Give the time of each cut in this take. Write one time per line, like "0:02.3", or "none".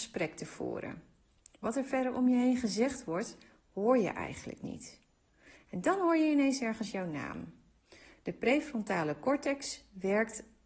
none